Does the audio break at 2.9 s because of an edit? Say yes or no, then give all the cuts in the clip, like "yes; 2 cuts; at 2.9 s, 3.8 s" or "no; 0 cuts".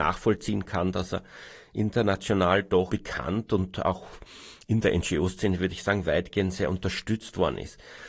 yes; 1 cut; at 2.9 s